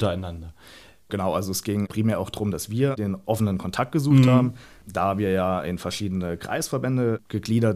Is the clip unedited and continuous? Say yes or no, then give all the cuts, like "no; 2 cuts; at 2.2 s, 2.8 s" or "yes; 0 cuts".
yes; 0 cuts